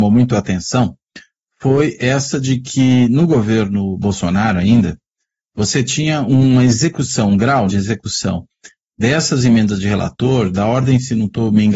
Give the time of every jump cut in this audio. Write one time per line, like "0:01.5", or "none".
0:07.7